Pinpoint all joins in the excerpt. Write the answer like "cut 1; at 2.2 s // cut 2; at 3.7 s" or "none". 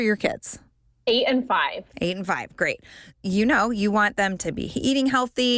cut 1; at 3.1 s